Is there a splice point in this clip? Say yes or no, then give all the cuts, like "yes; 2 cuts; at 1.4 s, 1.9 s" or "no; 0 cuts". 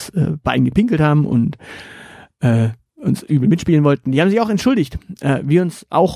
no; 0 cuts